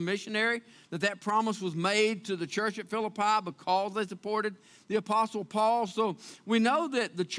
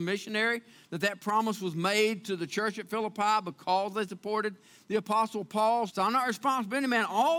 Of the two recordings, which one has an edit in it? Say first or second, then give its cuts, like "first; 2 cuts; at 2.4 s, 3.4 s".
second; 1 cut; at 5.9 s